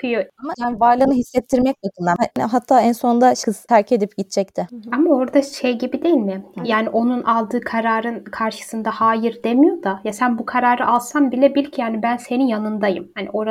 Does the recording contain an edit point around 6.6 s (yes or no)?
no